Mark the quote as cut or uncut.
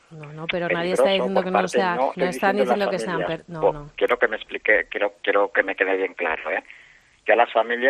cut